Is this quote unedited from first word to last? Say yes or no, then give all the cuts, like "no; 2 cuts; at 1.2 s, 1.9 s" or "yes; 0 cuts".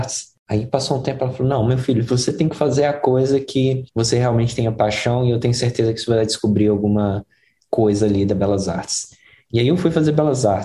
no; 1 cut; at 3.9 s